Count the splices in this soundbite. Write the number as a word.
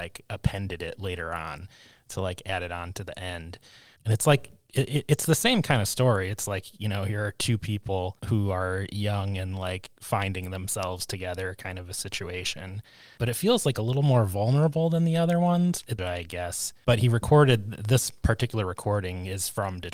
one